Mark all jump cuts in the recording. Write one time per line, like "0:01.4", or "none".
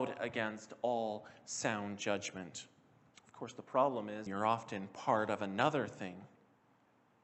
0:03.1
0:04.3